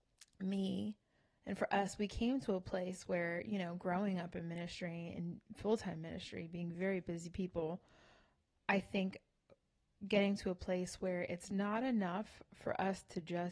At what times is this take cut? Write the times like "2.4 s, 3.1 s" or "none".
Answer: none